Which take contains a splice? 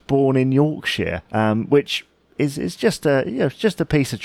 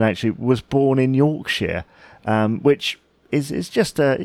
first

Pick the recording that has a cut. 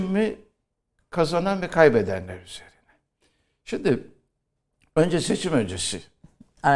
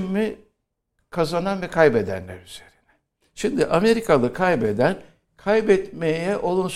second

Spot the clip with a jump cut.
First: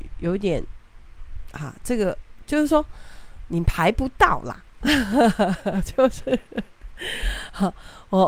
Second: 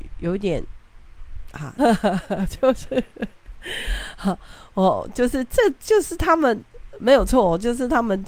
second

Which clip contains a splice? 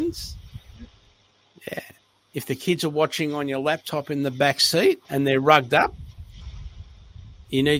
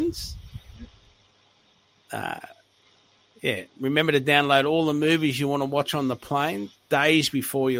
first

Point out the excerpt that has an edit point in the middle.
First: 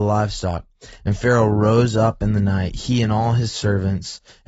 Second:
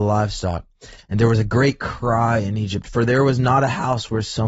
second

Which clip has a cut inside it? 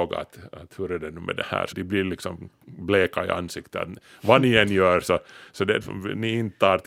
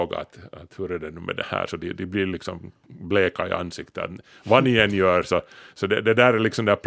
first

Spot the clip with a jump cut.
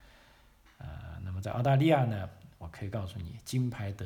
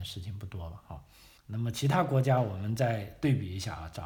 second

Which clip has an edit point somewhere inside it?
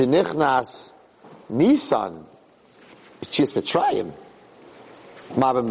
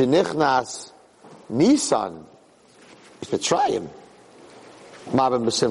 second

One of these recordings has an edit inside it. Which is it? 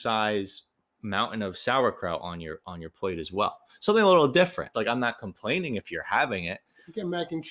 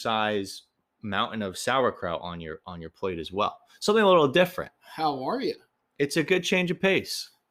first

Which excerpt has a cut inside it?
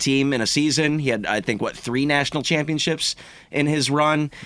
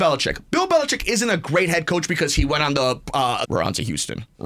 second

